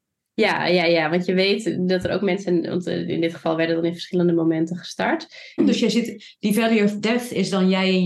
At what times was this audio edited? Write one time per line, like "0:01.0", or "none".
0:05.6